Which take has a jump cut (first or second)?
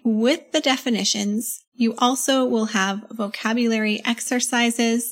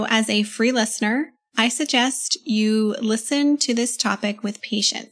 first